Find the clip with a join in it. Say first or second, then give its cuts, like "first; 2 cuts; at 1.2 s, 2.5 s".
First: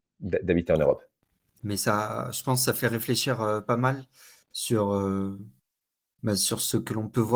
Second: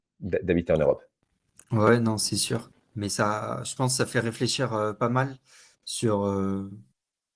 first; 1 cut; at 1.6 s